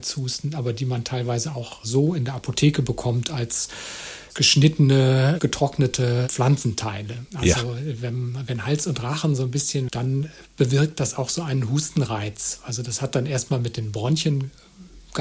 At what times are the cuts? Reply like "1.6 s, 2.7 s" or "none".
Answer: 7.3 s, 9.9 s